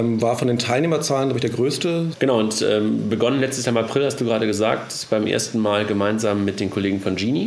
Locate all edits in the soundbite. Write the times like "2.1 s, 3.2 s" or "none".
2.1 s